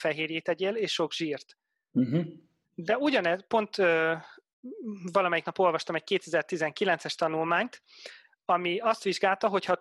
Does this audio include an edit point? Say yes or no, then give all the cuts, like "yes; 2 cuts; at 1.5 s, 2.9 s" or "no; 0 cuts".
yes; 1 cut; at 2.6 s